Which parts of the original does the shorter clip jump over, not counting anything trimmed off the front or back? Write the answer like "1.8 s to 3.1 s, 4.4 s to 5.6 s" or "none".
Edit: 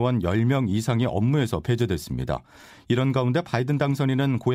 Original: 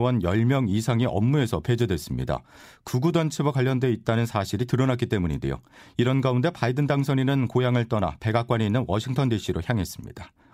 2.7 s to 5.8 s